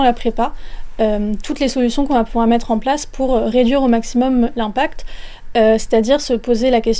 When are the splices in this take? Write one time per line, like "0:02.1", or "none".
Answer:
0:05.5